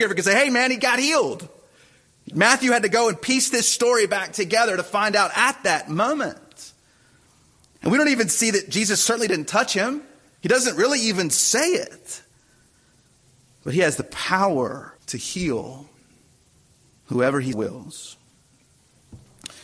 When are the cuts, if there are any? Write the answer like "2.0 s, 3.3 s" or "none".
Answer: 15.0 s, 17.5 s